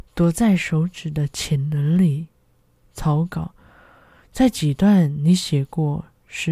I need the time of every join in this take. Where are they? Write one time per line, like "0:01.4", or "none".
0:02.8